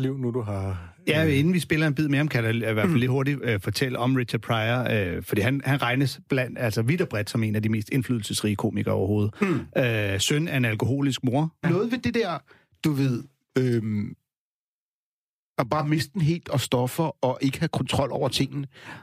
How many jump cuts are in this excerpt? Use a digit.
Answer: 1